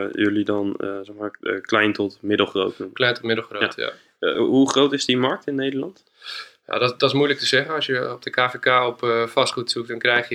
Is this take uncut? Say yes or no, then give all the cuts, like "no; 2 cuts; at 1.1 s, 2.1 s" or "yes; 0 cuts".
yes; 0 cuts